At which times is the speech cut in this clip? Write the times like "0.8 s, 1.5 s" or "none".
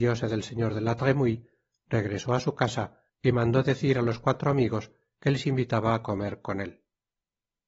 3.1 s